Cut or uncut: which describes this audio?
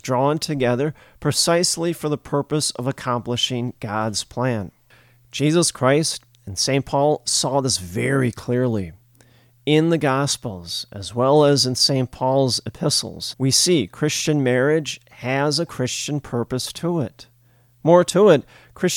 cut